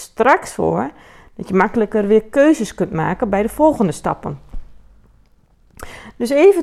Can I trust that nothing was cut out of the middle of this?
yes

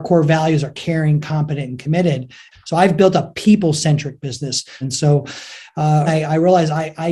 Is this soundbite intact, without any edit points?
no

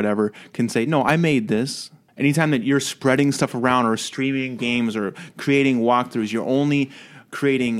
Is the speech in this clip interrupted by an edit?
yes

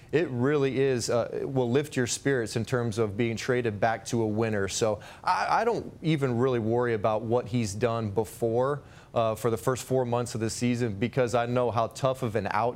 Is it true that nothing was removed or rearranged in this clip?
yes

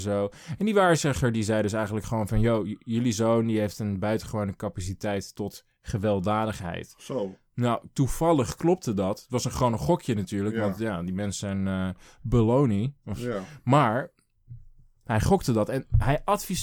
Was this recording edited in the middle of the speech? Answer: no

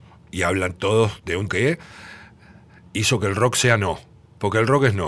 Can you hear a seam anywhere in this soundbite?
yes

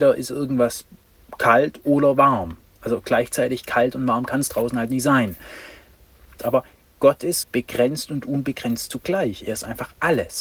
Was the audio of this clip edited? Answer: yes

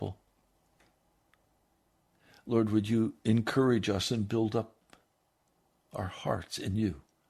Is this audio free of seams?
yes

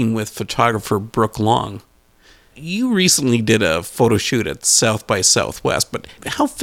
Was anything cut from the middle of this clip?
no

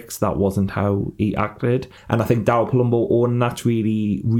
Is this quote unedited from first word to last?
no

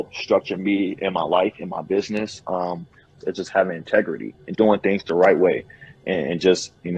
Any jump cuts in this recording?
yes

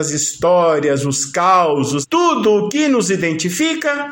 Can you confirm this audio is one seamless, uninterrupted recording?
no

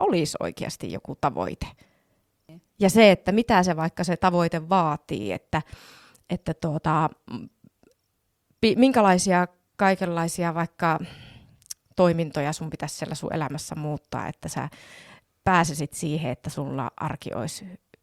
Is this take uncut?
yes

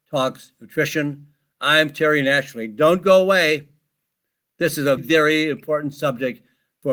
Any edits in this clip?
yes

